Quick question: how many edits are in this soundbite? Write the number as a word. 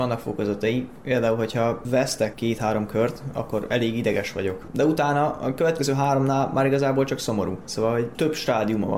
zero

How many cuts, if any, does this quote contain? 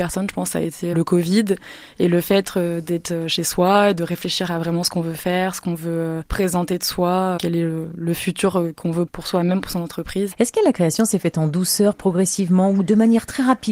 two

